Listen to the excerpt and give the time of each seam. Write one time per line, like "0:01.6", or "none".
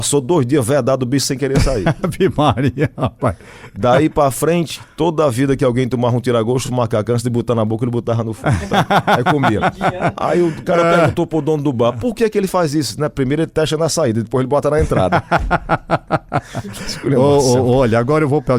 none

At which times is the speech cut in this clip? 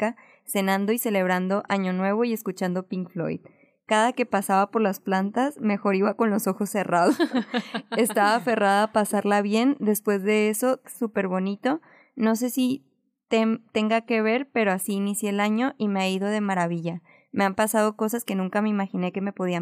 0:10.8

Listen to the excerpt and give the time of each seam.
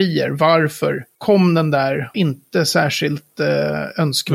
0:02.1

